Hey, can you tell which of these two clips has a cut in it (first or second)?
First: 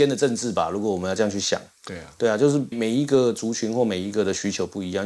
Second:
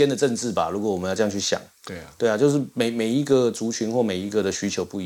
first